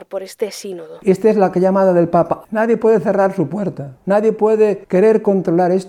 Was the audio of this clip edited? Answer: yes; 2 cuts; at 1.0 s, 2.5 s

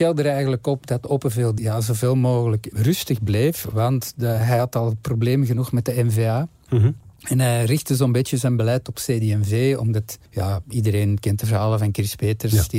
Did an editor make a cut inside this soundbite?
yes; 2 cuts; at 1.6 s, 10.3 s

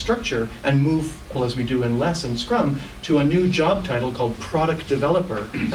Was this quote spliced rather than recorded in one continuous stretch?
yes; 1 cut; at 1.3 s

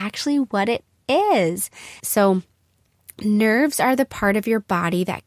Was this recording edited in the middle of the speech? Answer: yes; 1 cut; at 2.0 s

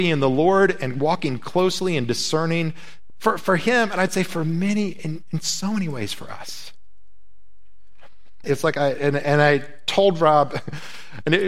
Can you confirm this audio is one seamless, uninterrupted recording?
no; 2 cuts; at 3.1 s, 8.4 s

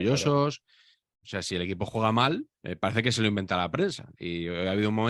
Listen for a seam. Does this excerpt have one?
yes; 2 cuts; at 1.2 s, 2.5 s

